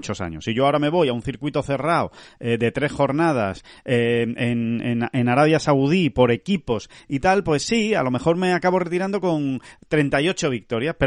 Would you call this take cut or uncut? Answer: uncut